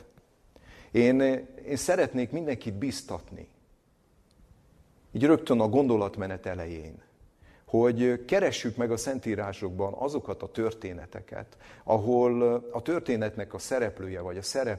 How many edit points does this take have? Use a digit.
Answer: 1